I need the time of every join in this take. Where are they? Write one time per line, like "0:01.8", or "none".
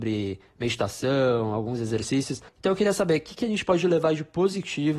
0:02.5